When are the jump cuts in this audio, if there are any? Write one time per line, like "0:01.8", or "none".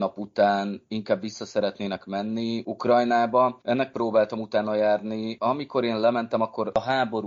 none